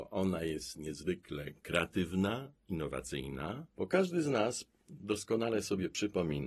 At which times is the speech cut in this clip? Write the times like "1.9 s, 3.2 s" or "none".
3.7 s